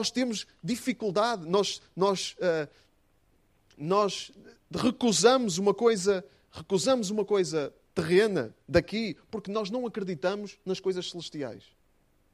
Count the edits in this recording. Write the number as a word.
two